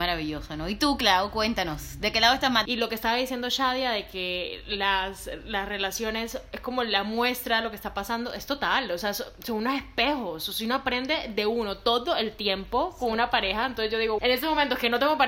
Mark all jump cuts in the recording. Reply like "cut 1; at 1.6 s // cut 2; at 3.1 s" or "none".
cut 1; at 2.7 s // cut 2; at 14.2 s